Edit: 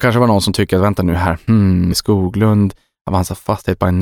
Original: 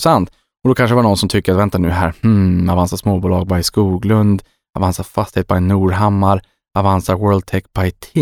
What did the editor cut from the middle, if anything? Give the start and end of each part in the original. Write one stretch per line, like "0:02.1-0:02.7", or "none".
0:02.7-0:03.6